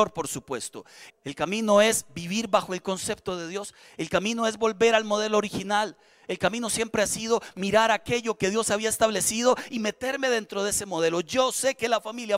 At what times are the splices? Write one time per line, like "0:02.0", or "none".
0:01.1